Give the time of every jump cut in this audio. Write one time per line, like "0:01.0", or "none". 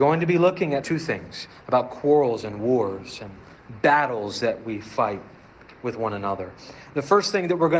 none